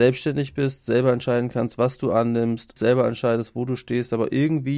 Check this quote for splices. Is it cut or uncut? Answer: cut